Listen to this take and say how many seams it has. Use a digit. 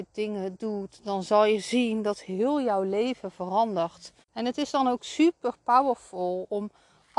1